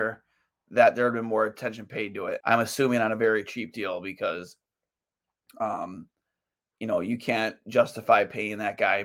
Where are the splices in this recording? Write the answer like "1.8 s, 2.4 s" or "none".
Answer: 2.4 s